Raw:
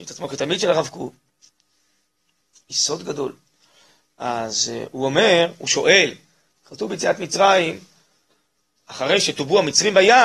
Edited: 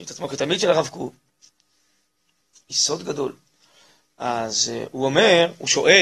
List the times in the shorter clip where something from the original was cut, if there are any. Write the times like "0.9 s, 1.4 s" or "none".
none